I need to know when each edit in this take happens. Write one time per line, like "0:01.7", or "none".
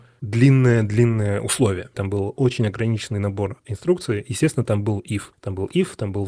0:01.9